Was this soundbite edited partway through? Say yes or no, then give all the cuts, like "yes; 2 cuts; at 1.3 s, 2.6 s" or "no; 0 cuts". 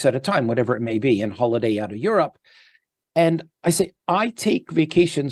no; 0 cuts